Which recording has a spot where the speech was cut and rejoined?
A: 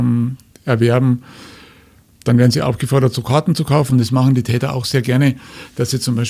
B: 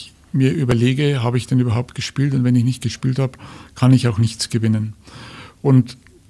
A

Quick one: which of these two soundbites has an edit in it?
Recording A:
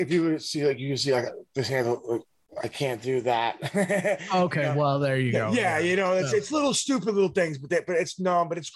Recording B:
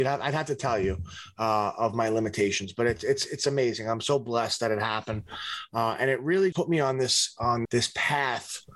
B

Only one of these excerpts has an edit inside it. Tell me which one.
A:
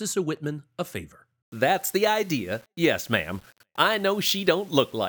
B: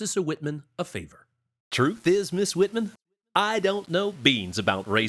A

